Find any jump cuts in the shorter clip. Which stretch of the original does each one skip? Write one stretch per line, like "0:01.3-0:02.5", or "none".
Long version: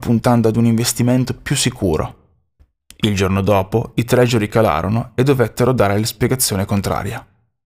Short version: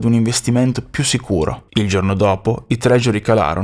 0:02.2-0:03.0